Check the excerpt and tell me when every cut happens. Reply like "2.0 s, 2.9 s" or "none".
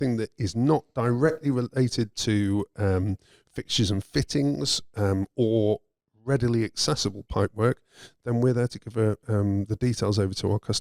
none